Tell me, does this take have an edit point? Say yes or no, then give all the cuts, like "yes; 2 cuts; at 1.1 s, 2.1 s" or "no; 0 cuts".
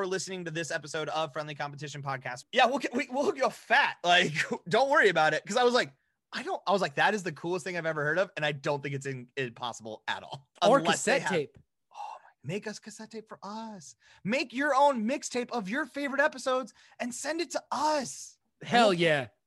yes; 2 cuts; at 2.4 s, 10.6 s